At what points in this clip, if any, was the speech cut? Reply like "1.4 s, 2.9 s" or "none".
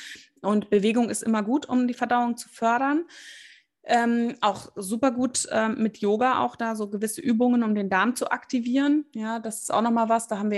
none